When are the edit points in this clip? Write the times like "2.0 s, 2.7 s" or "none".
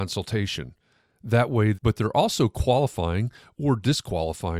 1.7 s